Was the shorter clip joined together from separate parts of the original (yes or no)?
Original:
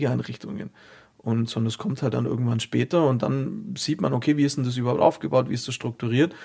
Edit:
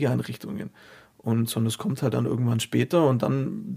no